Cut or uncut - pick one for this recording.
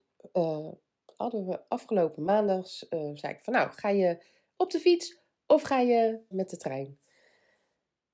cut